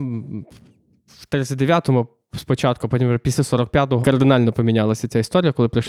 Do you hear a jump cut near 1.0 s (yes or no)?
no